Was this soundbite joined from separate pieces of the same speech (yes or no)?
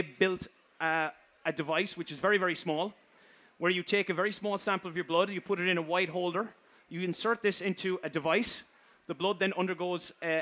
no